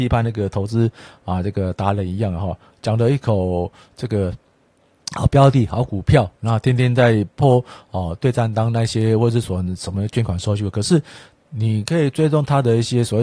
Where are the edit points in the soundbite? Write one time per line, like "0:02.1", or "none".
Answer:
none